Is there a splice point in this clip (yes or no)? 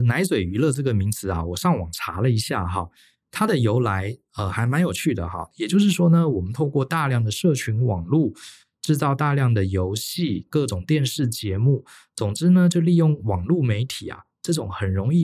yes